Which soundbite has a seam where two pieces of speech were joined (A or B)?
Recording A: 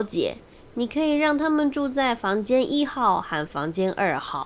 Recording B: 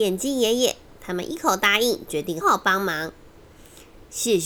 B